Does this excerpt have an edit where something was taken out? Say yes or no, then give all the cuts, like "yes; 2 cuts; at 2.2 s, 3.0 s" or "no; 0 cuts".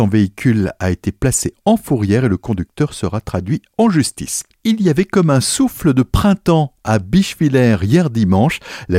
no; 0 cuts